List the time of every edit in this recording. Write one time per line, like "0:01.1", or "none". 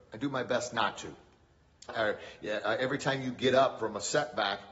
0:01.9